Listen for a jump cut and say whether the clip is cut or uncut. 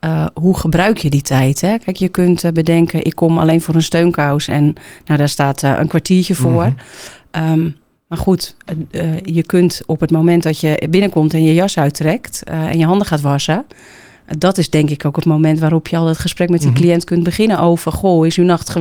uncut